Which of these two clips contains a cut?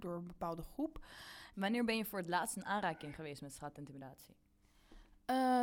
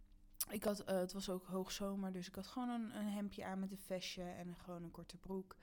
first; 1 cut; at 1.5 s

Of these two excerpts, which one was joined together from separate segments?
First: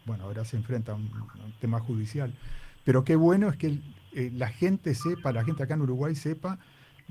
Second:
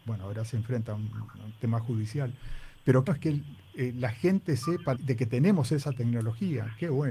second; 2 cuts; at 3.1 s, 4.9 s

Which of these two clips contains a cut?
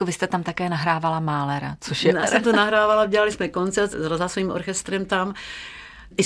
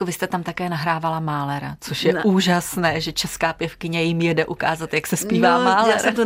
first; 1 cut; at 2.2 s

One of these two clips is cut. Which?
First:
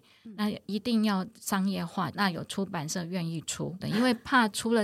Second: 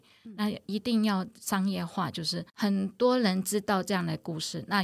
first; 2 cuts; at 2.1 s, 3.8 s

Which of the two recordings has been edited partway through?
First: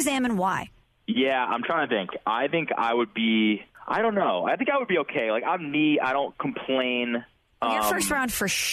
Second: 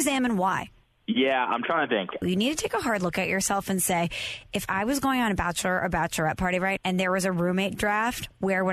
second; 2 cuts; at 2.2 s, 6.8 s

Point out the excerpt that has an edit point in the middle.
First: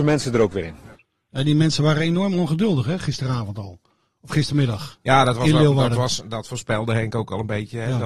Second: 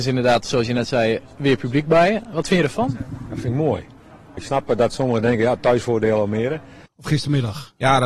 second; 2 cuts; at 4.4 s, 6.9 s

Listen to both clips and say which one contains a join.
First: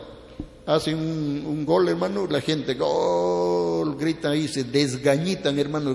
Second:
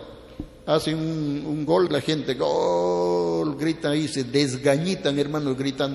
second; 1 cut; at 1.9 s

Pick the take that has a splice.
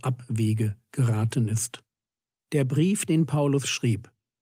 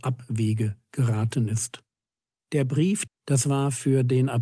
second; 1 cut; at 3.1 s

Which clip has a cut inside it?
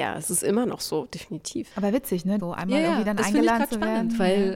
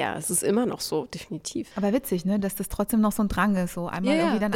first; 1 cut; at 2.4 s

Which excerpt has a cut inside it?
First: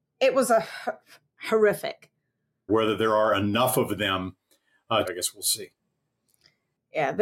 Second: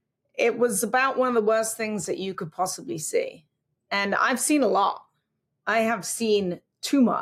first; 2 cuts; at 2.7 s, 5.0 s

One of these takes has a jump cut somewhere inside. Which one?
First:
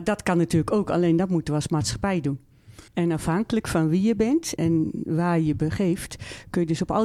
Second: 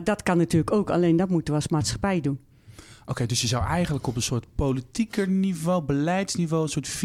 first; 2 cuts; at 2.9 s, 4.6 s

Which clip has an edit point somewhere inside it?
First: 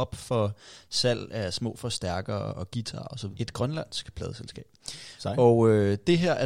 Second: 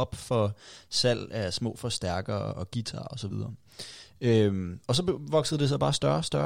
first; 1 cut; at 3.3 s

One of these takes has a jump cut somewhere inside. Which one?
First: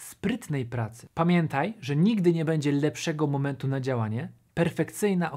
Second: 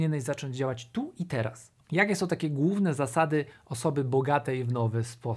second; 1 cut; at 1.8 s

